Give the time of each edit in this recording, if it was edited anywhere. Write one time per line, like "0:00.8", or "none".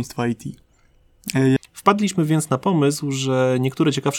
0:01.6

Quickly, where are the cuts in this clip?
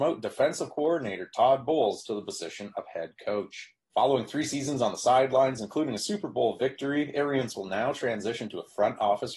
0:03.9

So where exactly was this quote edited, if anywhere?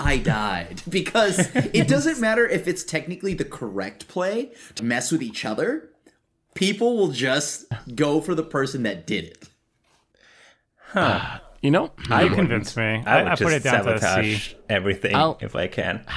0:04.8

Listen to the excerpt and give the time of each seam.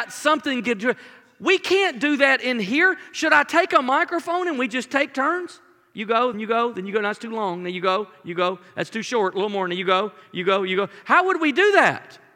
0:06.3

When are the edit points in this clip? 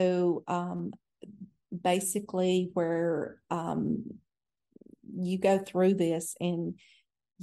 none

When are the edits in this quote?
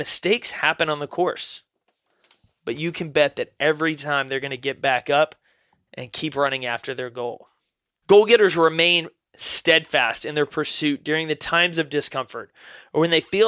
0:08.0

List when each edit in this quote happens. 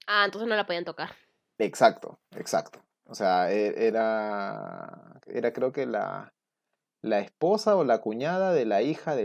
none

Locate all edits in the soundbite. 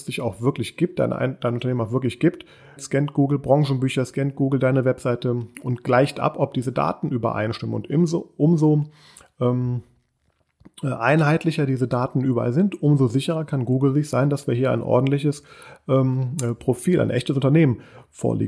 0:02.8

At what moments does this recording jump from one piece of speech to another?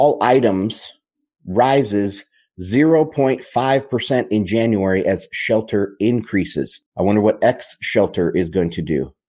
0:06.9

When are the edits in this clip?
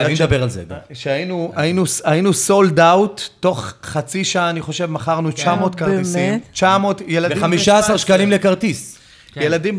none

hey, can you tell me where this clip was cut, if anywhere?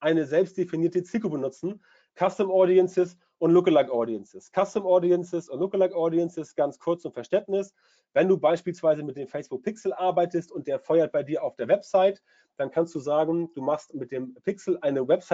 none

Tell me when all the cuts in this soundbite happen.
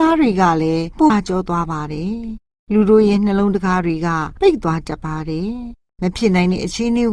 0:01.1

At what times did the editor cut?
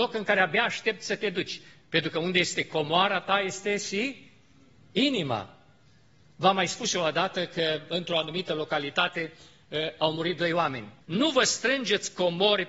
0:11.0

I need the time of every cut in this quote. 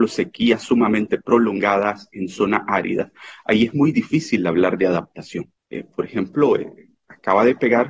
0:05.6

